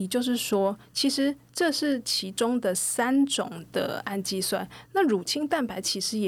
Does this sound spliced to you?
no; 0 cuts

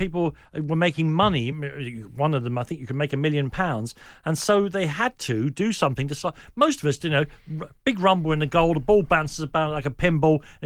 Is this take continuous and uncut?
yes; 0 cuts

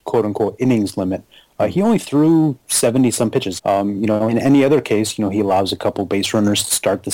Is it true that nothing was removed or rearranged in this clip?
no; 1 cut; at 3.6 s

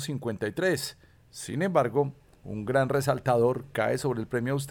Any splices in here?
yes; 1 cut; at 2.4 s

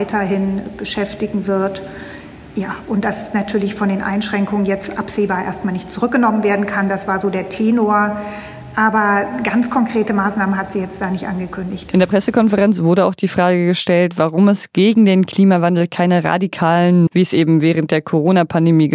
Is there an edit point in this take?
yes; 1 cut; at 17.1 s

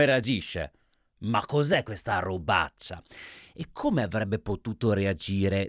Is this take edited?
no; 0 cuts

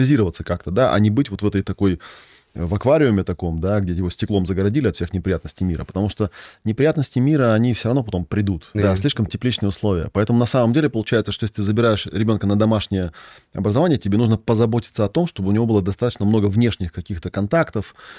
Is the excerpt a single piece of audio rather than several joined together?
no; 1 cut; at 8.7 s

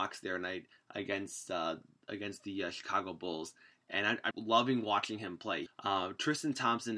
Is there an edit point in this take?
yes; 2 cuts; at 4.3 s, 5.7 s

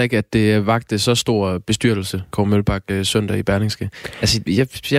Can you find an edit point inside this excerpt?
yes; 1 cut; at 2.3 s

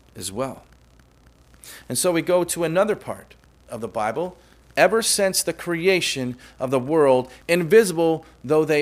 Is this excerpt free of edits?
no; 2 cuts; at 4.6 s, 7.4 s

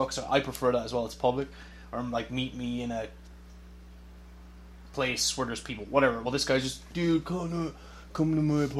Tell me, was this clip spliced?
no; 0 cuts

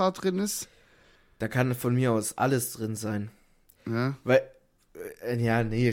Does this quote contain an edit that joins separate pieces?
no; 0 cuts

